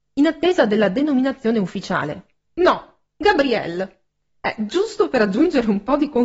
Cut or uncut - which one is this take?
cut